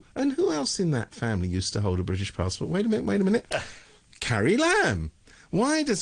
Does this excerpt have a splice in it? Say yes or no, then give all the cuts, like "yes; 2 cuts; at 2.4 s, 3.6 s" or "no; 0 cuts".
no; 0 cuts